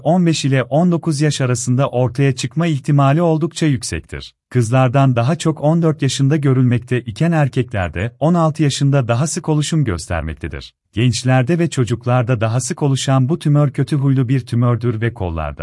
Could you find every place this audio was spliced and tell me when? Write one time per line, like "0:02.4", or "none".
0:04.4
0:10.8

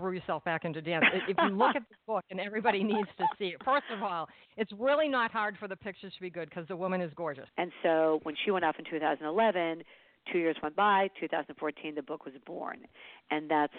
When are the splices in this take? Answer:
0:07.5

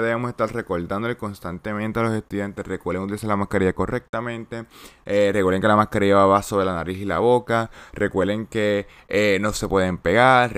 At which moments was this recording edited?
none

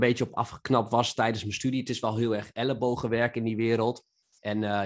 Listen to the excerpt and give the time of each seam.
none

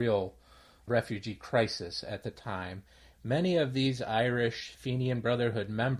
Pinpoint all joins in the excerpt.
0:03.1

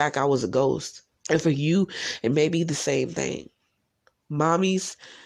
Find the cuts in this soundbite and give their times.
0:01.2

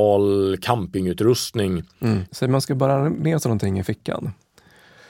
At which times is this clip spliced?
0:02.3

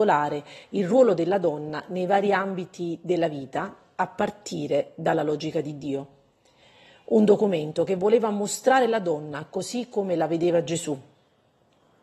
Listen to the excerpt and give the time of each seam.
none

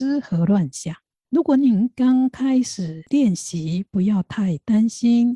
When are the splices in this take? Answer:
0:01.1

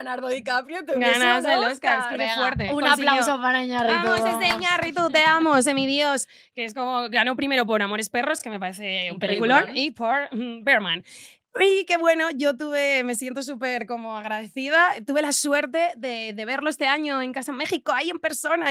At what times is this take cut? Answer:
none

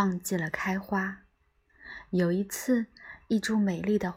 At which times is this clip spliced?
none

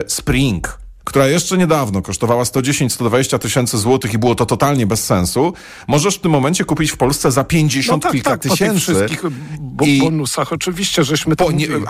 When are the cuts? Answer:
0:01.0

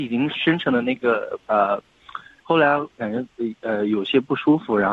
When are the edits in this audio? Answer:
0:02.4

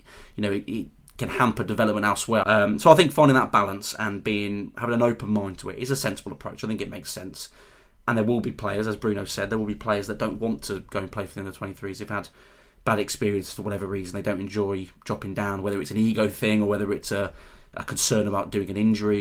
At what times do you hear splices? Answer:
0:02.4

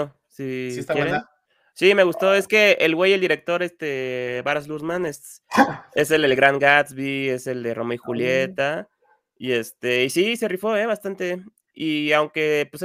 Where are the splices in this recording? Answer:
none

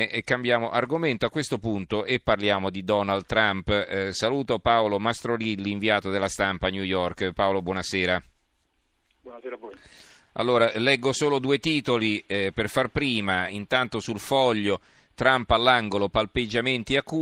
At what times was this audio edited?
none

